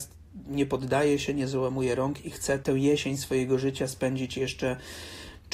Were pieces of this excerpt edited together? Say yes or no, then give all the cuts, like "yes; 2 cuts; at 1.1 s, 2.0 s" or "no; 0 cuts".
no; 0 cuts